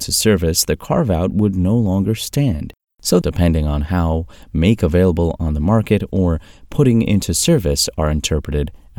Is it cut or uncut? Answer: cut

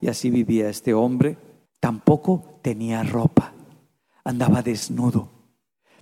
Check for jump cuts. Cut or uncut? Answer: cut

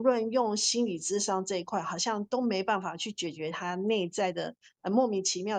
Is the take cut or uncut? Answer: uncut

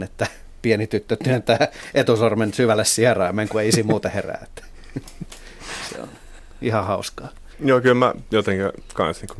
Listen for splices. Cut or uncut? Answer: cut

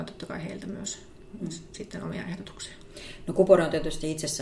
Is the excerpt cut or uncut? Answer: uncut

